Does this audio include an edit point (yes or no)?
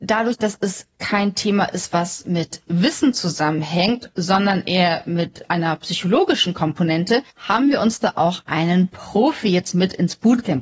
yes